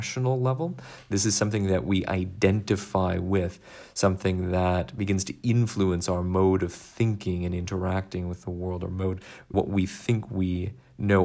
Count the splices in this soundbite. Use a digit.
1